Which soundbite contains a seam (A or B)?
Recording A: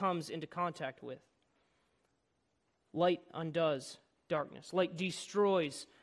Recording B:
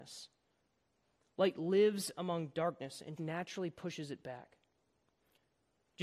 B